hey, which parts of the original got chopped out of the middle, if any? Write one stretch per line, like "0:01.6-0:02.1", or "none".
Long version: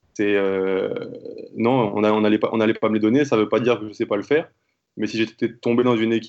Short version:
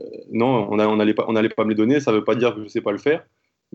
none